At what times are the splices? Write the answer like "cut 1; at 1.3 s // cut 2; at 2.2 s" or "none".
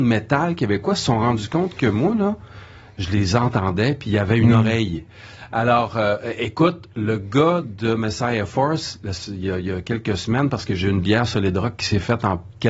none